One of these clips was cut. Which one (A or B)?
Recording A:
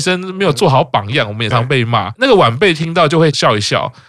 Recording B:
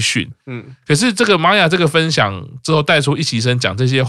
A